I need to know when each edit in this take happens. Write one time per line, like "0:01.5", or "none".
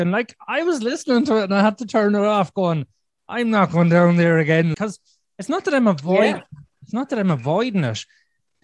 0:04.7